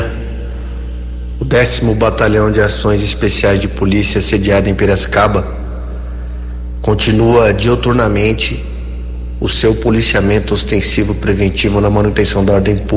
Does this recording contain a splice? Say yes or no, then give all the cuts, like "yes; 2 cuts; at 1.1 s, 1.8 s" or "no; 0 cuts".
no; 0 cuts